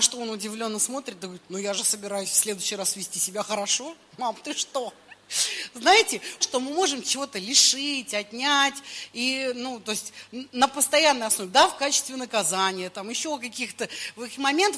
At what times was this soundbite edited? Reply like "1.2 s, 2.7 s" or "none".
6.4 s